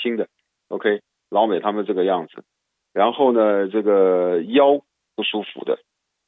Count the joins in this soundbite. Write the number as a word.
zero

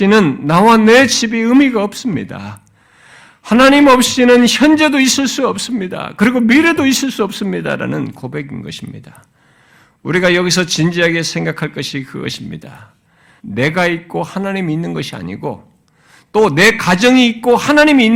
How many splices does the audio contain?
one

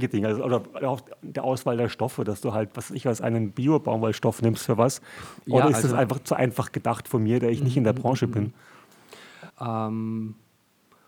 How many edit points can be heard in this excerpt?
one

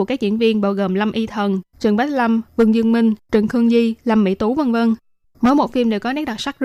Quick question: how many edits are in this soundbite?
one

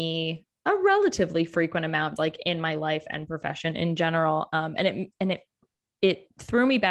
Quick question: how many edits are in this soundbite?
one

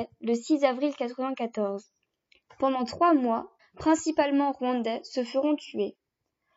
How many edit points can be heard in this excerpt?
one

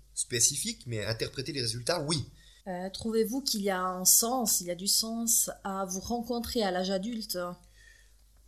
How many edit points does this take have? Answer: one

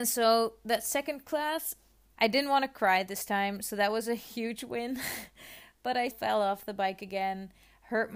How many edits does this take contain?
two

